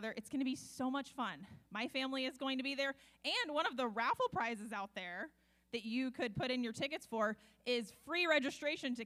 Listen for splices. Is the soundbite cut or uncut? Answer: uncut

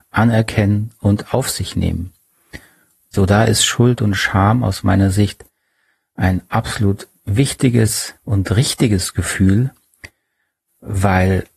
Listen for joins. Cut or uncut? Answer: cut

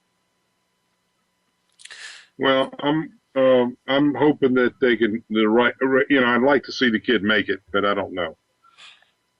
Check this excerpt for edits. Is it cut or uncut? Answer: uncut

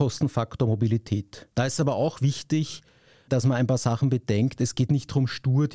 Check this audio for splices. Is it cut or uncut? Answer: cut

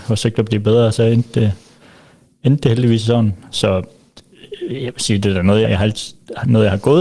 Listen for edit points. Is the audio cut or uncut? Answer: cut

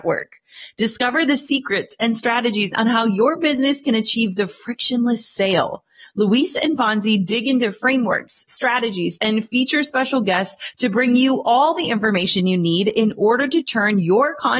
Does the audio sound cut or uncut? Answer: cut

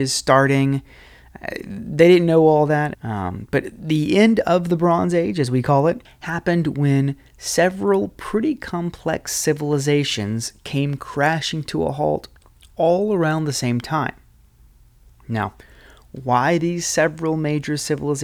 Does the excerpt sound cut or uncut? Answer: cut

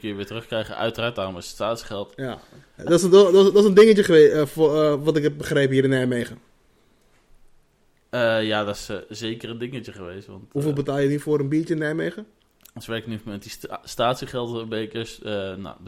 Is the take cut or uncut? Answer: cut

